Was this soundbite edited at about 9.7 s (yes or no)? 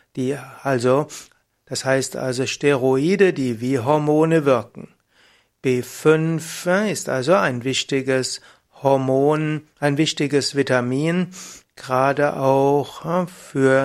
no